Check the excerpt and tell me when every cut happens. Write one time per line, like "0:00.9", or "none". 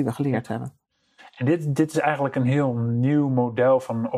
none